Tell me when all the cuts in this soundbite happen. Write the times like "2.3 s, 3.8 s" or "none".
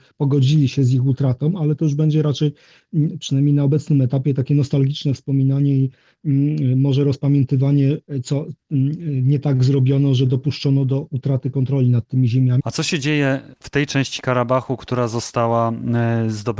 12.6 s

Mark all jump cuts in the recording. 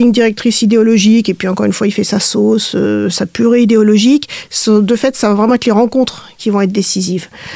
none

